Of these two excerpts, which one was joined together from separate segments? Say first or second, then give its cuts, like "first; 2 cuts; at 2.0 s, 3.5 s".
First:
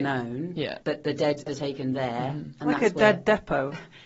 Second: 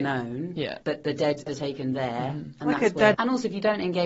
second; 1 cut; at 3.1 s